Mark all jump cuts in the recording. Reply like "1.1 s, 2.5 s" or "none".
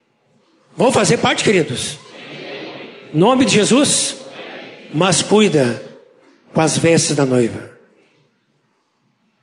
none